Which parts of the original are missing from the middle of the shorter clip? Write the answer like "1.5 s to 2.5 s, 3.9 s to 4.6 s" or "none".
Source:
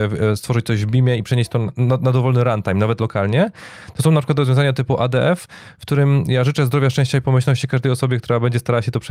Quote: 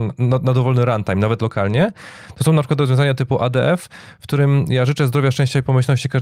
none